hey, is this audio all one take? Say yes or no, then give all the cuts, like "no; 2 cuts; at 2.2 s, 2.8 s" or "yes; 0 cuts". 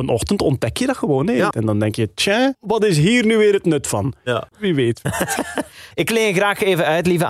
no; 2 cuts; at 1.5 s, 4.5 s